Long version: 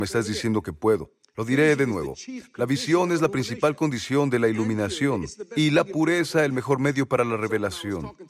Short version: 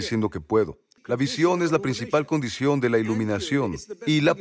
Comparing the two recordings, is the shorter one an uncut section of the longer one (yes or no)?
no